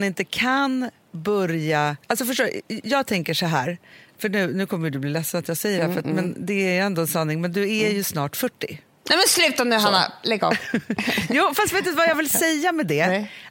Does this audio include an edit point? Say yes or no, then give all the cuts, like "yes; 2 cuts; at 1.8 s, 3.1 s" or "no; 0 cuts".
yes; 1 cut; at 2.0 s